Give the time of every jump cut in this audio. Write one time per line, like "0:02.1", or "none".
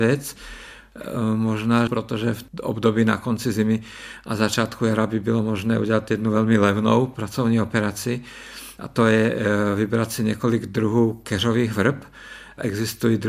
0:01.9